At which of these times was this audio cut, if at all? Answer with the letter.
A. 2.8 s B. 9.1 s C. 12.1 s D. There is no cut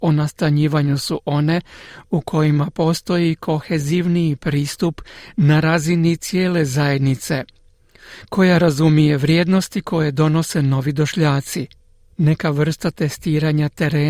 C